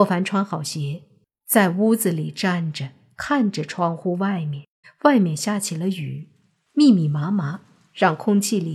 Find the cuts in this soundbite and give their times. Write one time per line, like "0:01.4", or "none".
0:04.8
0:06.7